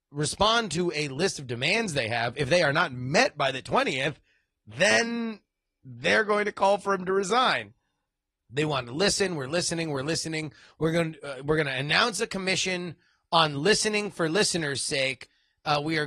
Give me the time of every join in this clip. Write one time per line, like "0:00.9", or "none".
0:08.4